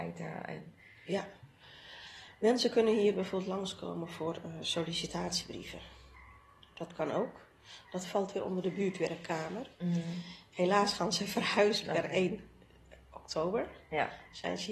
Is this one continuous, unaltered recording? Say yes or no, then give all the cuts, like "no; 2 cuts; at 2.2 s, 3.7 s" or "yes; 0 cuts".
yes; 0 cuts